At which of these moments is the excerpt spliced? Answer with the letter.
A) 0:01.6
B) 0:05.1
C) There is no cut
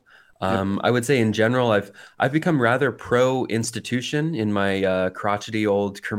C